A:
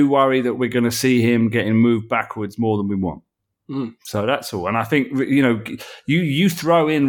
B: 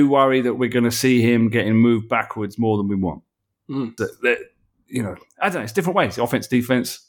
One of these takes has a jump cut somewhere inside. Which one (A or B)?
B